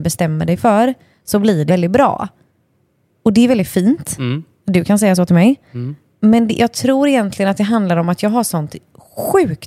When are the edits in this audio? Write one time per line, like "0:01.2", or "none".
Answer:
0:01.7

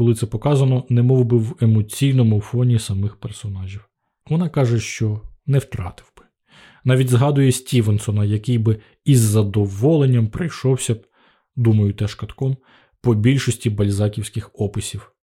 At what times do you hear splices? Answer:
0:04.2

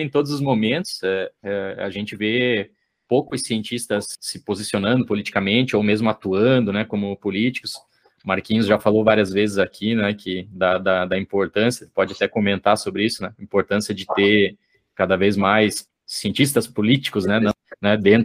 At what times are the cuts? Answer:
0:01.4

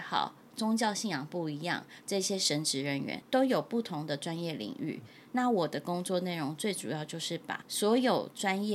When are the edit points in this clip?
none

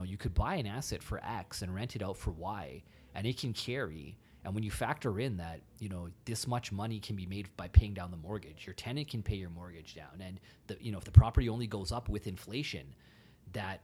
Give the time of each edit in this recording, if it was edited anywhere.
none

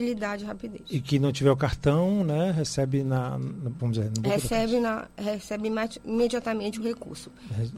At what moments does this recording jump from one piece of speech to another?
0:03.8

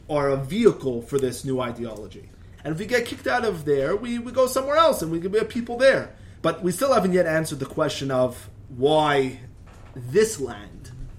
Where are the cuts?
0:02.6
0:06.4

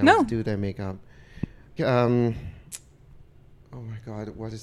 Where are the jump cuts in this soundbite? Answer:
0:01.8

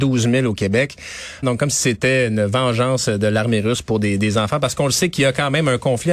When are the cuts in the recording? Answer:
0:01.4

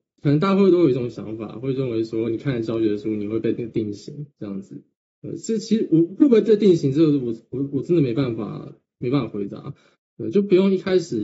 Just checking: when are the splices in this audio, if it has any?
0:09.9

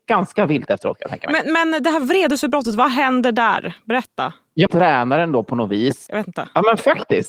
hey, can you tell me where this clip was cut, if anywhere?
0:04.7
0:06.1

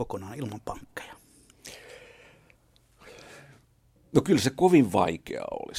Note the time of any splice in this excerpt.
none

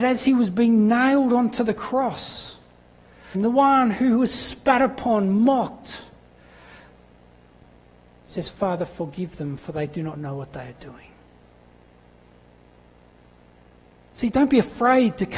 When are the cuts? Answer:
0:03.3

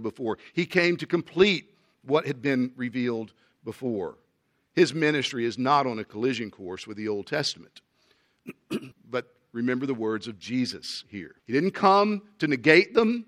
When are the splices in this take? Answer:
0:08.9
0:11.4

